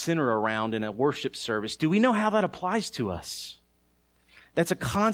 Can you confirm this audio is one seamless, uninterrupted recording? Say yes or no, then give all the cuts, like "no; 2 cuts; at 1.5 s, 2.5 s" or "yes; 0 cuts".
no; 1 cut; at 1.8 s